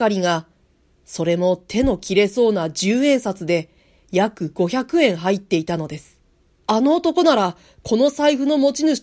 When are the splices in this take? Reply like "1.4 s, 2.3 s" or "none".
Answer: 6.6 s